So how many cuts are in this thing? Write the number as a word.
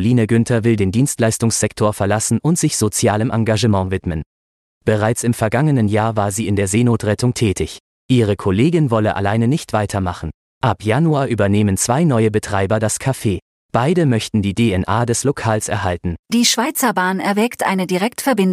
two